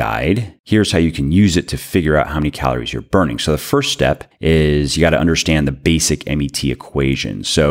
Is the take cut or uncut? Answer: uncut